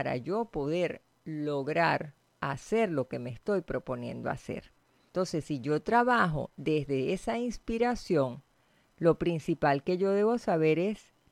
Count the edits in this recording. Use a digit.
0